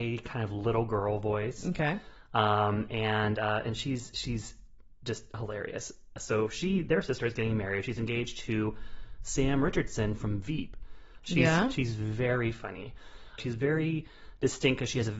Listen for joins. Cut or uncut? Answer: cut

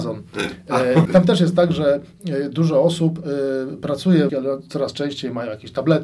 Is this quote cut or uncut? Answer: cut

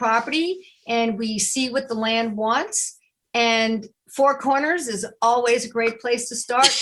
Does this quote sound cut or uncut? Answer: uncut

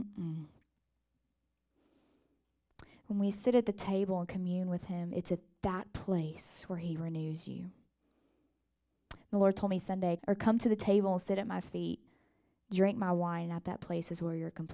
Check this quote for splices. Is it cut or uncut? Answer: cut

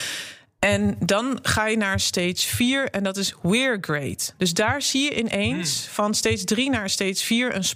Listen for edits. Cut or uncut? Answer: uncut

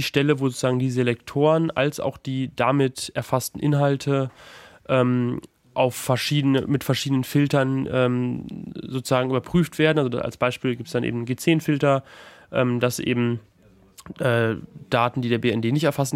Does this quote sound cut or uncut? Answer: uncut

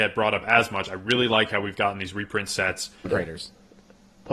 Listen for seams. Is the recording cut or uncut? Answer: cut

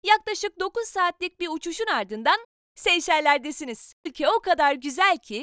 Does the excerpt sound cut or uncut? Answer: cut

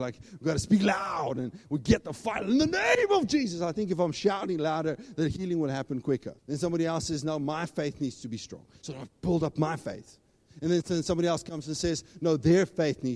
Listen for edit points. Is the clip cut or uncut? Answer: cut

